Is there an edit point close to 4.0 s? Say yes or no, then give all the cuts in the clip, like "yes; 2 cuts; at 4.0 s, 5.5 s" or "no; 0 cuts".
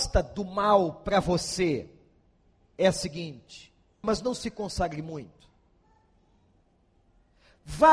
yes; 1 cut; at 4.0 s